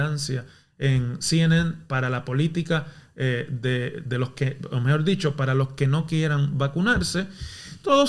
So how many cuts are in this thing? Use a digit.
0